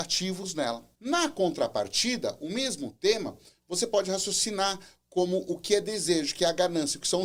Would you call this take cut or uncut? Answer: cut